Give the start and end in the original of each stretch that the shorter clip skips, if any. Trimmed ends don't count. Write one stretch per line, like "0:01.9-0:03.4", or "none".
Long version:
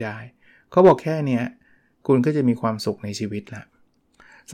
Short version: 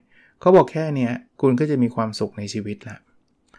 0:01.6-0:01.9